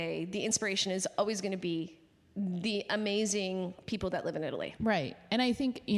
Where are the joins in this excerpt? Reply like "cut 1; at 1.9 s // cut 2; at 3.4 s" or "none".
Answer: cut 1; at 4.8 s